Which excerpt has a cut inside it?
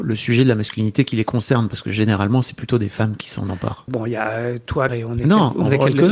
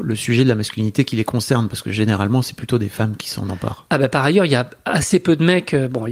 first; 2 cuts; at 3.9 s, 4.9 s

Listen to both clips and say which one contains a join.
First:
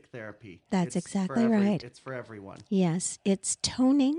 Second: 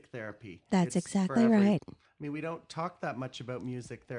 second; 1 cut; at 1.8 s

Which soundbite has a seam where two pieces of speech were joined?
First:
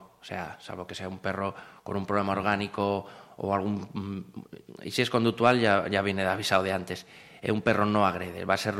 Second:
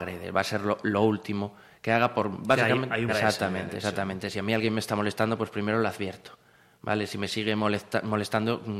second; 1 cut; at 3.1 s

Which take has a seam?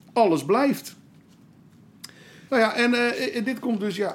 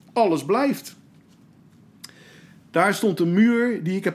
first; 1 cut; at 2.5 s

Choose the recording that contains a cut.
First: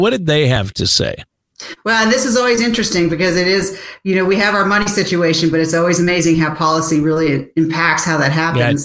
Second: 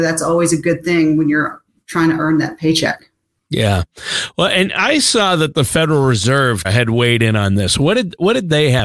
second; 1 cut; at 6.6 s

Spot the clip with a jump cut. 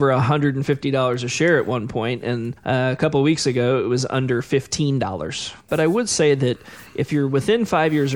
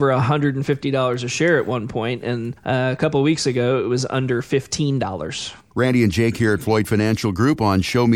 first; 1 cut; at 5.7 s

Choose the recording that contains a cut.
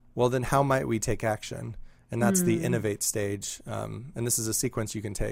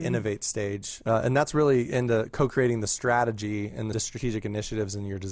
second; 2 cuts; at 1.0 s, 3.9 s

